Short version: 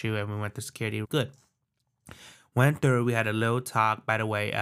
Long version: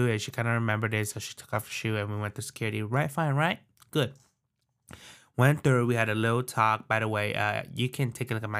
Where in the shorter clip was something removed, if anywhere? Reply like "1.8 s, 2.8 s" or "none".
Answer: 1.0 s